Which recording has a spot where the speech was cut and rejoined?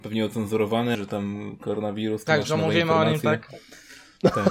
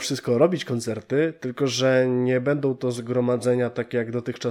first; 1 cut; at 0.9 s

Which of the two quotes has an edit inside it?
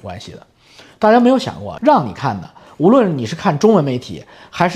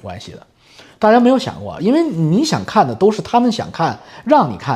first; 1 cut; at 1.8 s

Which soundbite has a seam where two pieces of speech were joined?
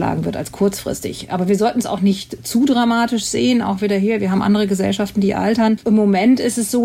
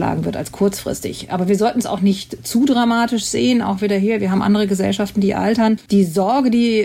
first; 1 cut; at 5.8 s

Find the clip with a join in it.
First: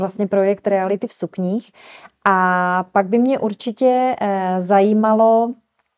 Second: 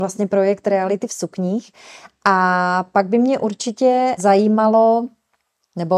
second; 1 cut; at 4.2 s

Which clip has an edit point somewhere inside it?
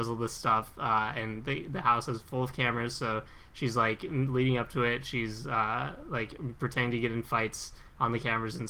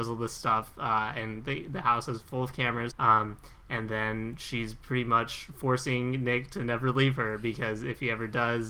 second; 1 cut; at 2.9 s

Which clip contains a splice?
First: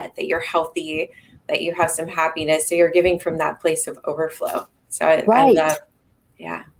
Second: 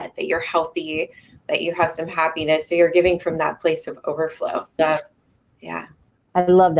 second; 1 cut; at 4.8 s

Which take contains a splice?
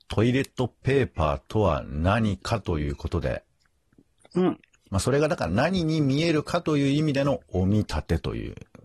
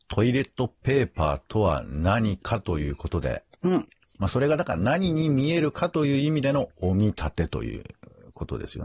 second; 1 cut; at 3.5 s

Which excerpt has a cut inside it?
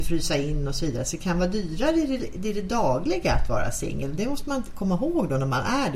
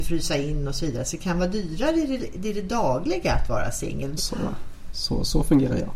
second; 1 cut; at 4.2 s

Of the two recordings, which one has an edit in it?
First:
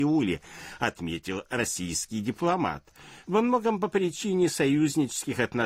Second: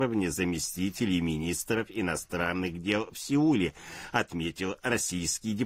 first; 1 cut; at 3.2 s

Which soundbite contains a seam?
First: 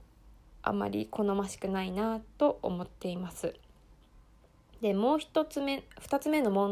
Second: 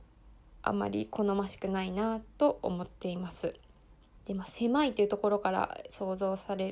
second; 1 cut; at 4.2 s

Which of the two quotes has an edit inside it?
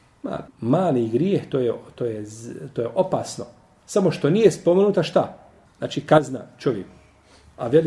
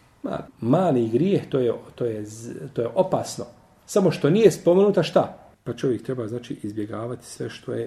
second; 1 cut; at 5.5 s

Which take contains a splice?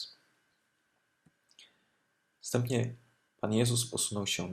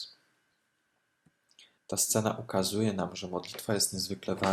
second; 1 cut; at 1.8 s

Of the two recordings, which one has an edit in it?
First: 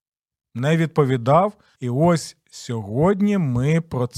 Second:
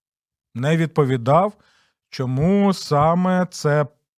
first; 1 cut; at 1.7 s

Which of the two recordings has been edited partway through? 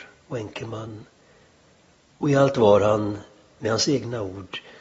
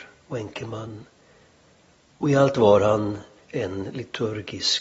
second; 1 cut; at 3.4 s

